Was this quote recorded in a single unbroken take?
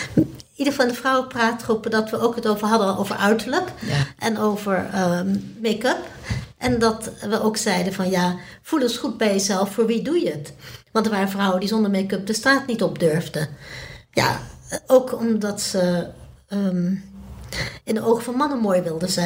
yes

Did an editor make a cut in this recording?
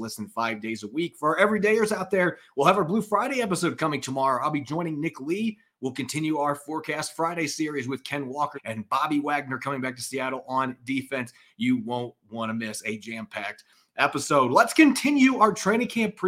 yes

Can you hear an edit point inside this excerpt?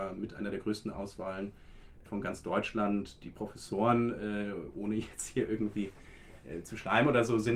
no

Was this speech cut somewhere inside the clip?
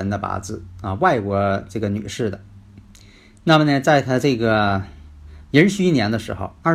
no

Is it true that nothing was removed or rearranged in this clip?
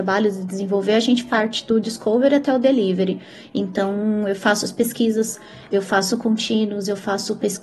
yes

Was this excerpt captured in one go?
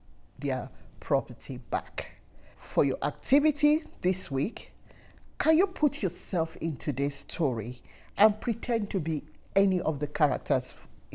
no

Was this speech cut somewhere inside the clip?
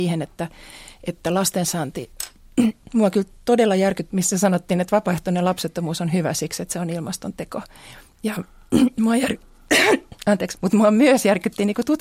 yes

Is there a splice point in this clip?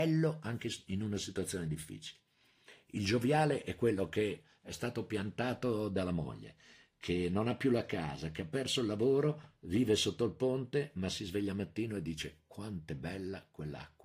no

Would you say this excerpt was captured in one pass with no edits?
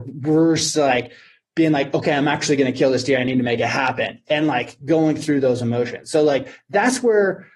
yes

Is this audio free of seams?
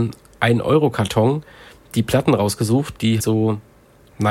no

